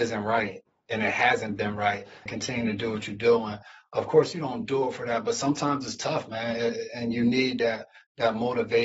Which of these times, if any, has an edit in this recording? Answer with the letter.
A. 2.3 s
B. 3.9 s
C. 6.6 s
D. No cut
A